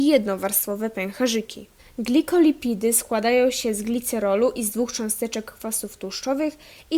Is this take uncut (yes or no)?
no